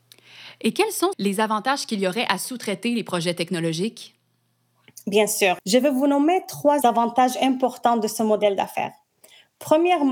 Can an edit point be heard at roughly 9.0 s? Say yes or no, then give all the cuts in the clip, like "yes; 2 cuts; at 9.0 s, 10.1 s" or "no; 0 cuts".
no; 2 cuts; at 1.1 s, 5.6 s